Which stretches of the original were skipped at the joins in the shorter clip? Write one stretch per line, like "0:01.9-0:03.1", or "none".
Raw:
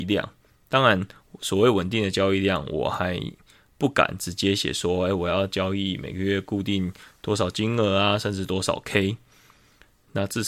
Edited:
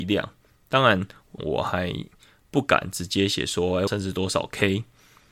0:01.4-0:02.7
0:05.1-0:08.2